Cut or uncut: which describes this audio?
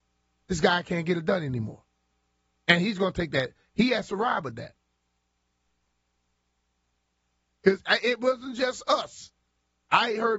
uncut